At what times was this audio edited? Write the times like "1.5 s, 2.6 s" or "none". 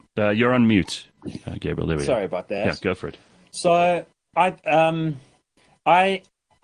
none